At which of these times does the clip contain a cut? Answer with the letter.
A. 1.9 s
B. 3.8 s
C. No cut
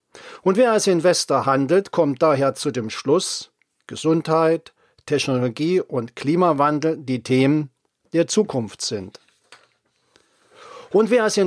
B